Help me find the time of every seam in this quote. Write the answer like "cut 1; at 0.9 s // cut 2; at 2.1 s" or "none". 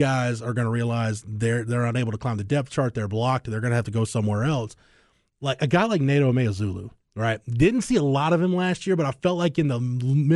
none